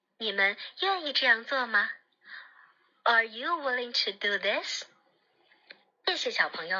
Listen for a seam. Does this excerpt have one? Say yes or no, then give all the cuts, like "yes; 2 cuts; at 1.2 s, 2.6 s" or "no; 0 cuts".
no; 0 cuts